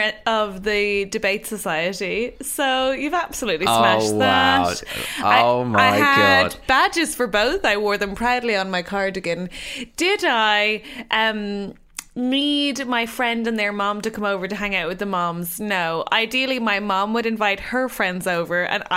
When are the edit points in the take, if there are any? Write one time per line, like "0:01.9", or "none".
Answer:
none